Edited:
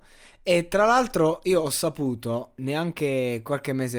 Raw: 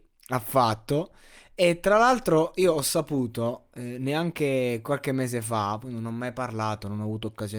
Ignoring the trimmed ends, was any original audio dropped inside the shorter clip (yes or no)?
yes